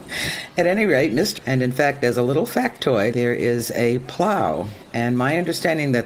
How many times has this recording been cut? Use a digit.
2